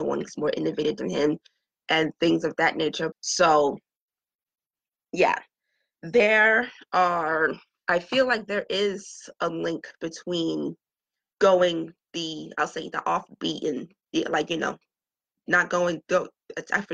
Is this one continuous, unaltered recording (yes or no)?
no